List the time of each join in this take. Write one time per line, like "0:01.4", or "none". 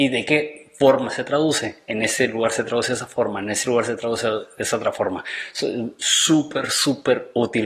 none